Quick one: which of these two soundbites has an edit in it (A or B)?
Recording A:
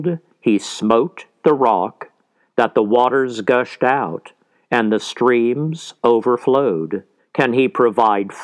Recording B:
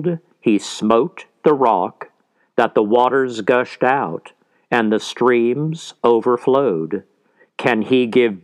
A